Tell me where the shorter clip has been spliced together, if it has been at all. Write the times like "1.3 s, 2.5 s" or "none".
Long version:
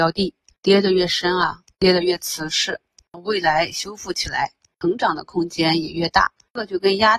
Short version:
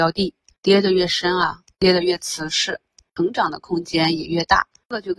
3.0 s